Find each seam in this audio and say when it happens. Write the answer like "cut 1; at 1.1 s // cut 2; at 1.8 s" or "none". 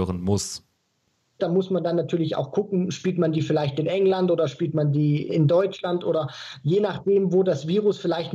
cut 1; at 1.4 s // cut 2; at 5.3 s